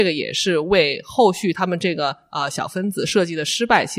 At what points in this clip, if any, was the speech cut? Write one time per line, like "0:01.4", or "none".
none

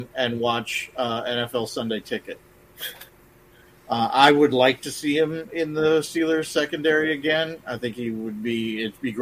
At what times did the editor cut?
0:03.7

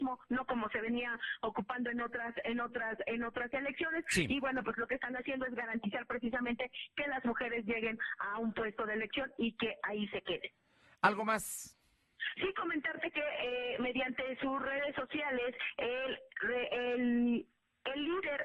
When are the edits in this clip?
none

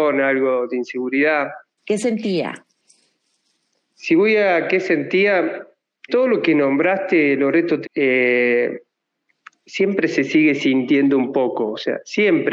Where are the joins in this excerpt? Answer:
0:01.8
0:06.1
0:07.8

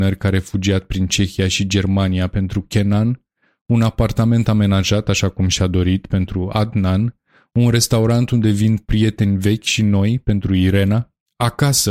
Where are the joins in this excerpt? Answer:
none

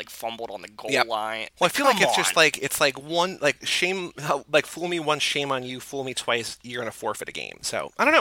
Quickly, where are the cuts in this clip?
0:01.5

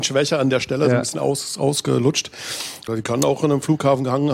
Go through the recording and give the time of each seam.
0:02.9

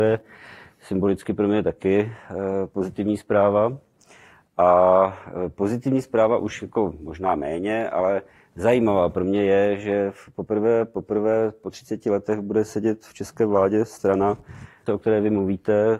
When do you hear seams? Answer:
0:14.9

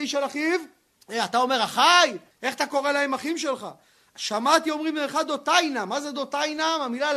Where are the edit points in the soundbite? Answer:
0:00.9
0:02.3

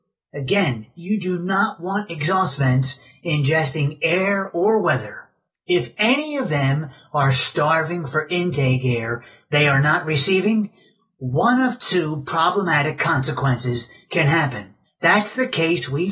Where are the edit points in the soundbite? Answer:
0:05.5
0:14.8

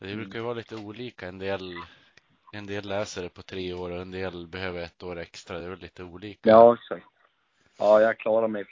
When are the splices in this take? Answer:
none

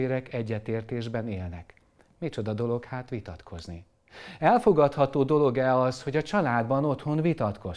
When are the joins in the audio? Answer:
none

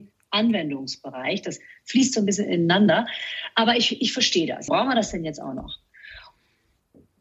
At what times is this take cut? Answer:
0:04.7

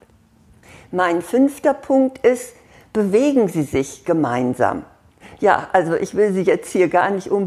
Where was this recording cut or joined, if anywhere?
none

